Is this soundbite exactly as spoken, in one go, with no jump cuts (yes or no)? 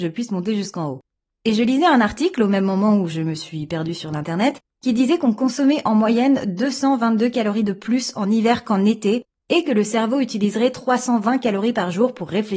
yes